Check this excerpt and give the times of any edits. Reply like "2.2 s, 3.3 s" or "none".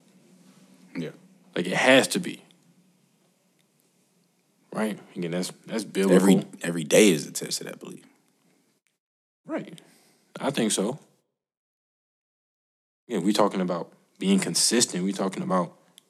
none